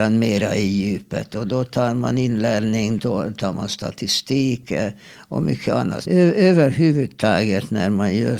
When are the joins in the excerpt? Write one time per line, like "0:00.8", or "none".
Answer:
0:03.0
0:06.1